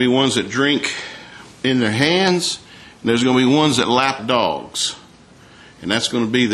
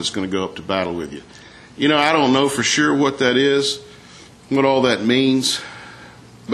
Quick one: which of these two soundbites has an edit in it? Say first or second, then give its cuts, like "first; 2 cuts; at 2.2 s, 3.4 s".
first; 1 cut; at 4.2 s